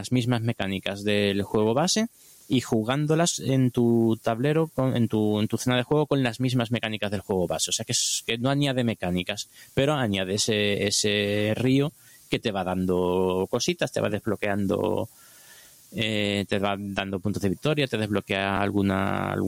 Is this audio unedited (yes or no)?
yes